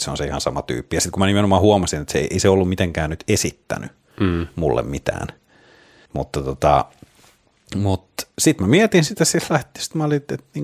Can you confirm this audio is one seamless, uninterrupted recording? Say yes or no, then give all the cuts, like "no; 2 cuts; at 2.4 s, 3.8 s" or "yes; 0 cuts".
no; 1 cut; at 6.1 s